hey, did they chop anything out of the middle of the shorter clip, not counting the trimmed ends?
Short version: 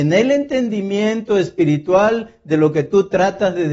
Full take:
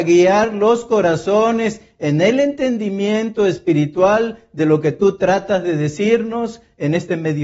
no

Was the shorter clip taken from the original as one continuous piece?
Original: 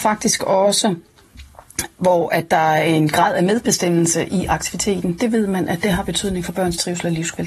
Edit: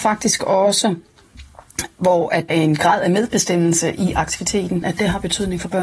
no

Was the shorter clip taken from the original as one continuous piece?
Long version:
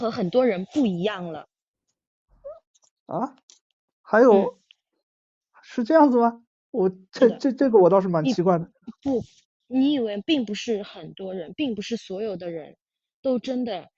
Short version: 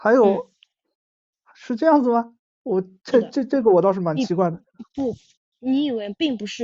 yes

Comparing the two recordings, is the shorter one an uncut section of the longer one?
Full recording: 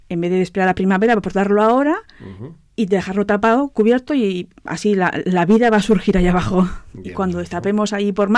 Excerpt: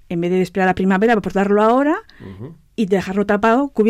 yes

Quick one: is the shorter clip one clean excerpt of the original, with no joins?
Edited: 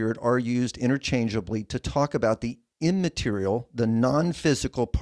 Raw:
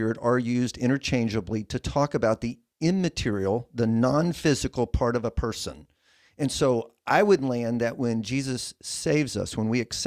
yes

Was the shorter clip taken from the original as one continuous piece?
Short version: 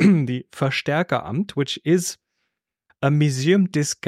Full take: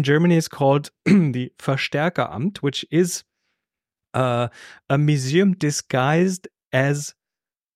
no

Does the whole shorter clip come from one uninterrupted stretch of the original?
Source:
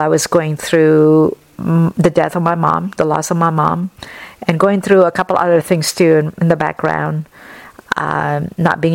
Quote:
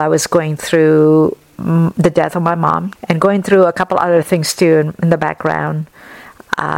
no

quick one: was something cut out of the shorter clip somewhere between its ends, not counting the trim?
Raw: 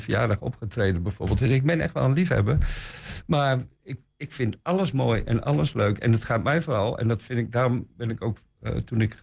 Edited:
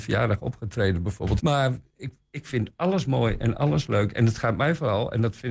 yes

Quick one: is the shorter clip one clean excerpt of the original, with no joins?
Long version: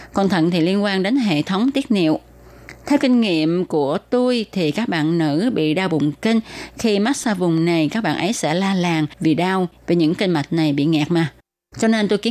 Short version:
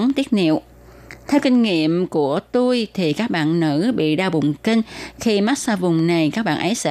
yes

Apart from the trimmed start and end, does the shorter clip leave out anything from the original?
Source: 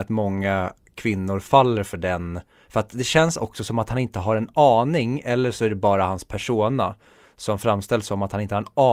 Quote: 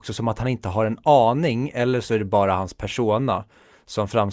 no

